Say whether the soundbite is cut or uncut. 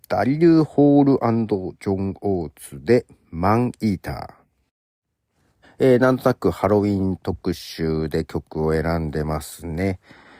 cut